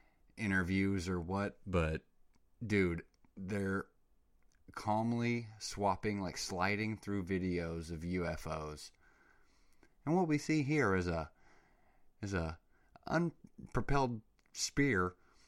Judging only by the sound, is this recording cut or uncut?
uncut